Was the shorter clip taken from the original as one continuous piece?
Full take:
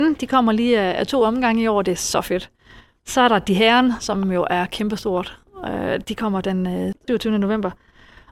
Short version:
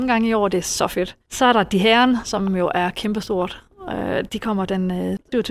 no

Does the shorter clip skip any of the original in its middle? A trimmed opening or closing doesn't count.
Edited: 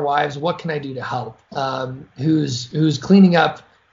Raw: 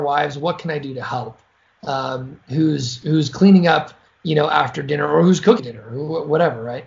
yes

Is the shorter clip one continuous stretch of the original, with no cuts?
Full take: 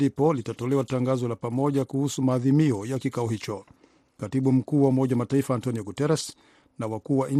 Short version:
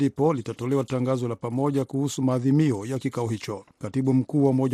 no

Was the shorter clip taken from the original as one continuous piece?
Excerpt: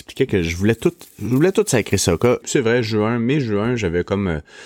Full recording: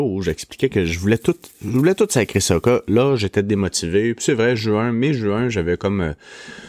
no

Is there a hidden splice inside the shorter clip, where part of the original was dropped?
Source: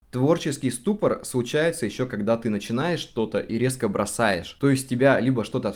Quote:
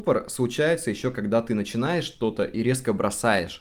no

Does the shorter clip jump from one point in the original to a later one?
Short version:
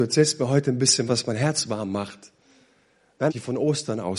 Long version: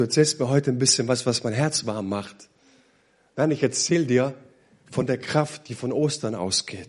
yes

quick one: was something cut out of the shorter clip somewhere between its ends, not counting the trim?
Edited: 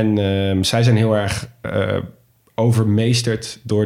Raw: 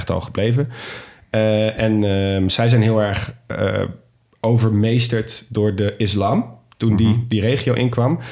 no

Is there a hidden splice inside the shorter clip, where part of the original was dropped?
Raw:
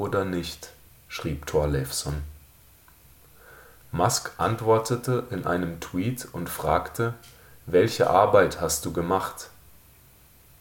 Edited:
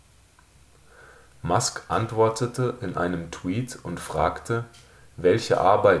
no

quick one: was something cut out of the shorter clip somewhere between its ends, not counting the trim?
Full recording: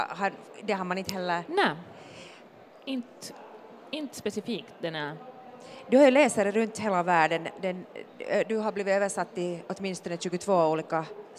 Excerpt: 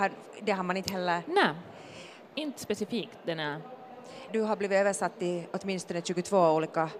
yes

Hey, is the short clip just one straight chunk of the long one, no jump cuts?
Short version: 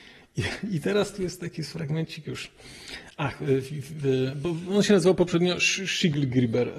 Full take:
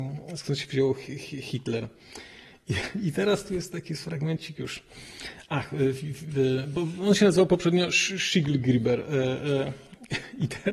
yes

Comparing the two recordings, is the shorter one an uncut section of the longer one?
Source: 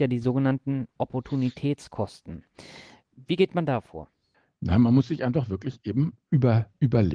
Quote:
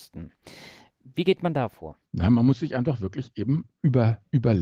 no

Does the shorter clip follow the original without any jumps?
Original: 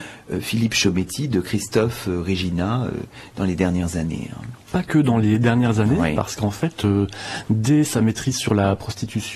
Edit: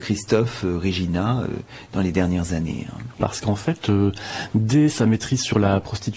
no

